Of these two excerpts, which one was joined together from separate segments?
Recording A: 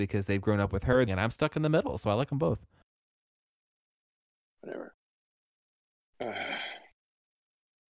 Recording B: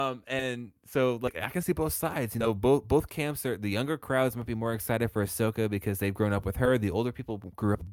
A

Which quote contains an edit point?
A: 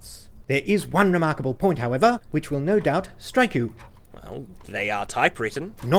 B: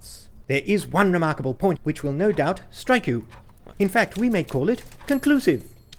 B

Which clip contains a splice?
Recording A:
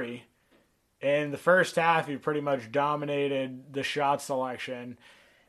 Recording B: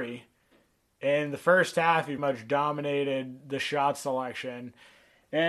B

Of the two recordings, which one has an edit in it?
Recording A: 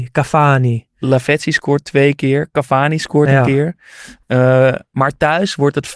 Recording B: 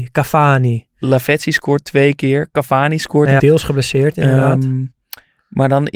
B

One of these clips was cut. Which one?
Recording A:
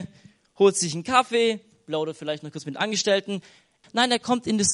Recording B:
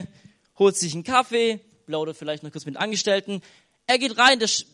A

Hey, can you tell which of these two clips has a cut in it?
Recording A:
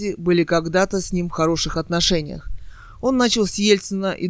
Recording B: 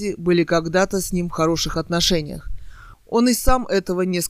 B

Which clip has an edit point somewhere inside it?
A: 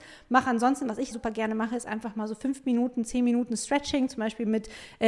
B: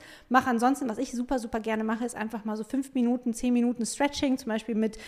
A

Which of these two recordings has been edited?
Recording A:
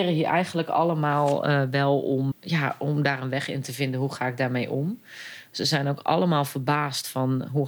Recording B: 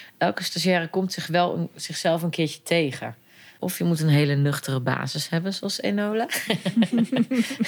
A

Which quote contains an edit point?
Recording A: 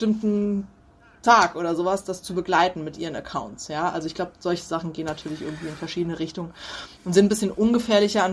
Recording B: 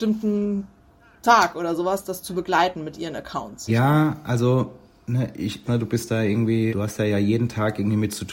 B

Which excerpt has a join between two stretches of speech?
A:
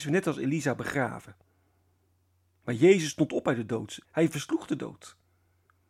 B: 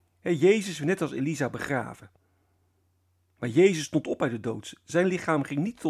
A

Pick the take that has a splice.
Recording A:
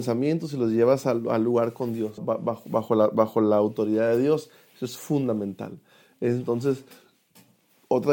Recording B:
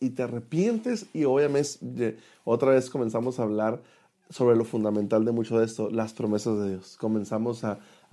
A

